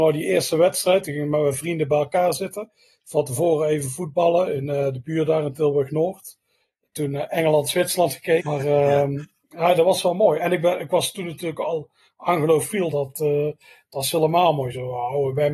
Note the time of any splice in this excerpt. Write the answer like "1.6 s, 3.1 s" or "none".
8.4 s, 12.9 s